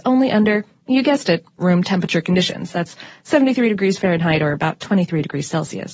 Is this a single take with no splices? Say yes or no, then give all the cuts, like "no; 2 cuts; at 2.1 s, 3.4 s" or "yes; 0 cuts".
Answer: yes; 0 cuts